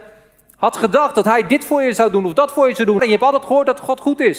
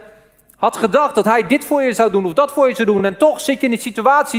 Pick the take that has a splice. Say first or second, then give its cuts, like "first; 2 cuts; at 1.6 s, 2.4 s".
first; 1 cut; at 3.0 s